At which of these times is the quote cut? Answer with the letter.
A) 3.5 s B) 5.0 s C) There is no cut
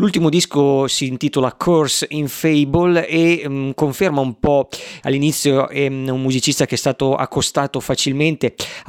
B